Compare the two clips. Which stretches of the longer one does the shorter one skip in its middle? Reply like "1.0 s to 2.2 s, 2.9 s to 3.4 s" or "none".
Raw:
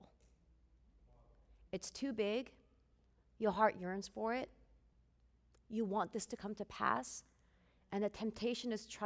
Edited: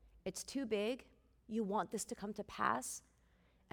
2.8 s to 5.6 s